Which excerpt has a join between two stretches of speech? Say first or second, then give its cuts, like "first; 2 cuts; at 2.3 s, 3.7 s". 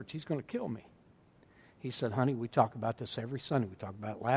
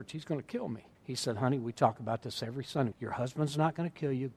second; 2 cuts; at 1.0 s, 2.9 s